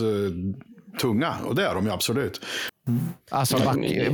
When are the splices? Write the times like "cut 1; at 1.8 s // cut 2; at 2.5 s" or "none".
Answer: cut 1; at 2.7 s